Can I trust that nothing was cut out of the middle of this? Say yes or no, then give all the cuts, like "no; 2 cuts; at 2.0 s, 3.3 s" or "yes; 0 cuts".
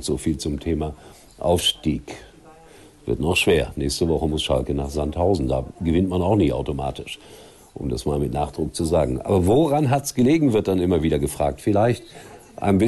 yes; 0 cuts